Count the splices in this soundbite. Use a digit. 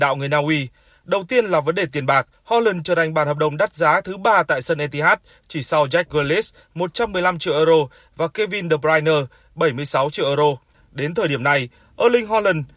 2